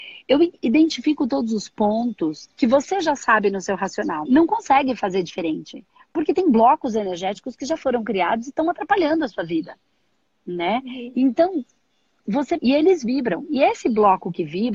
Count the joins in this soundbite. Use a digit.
2